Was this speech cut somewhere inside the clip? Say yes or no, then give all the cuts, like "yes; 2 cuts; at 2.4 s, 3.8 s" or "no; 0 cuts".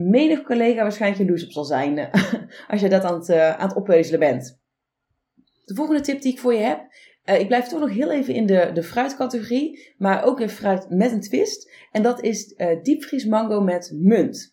no; 0 cuts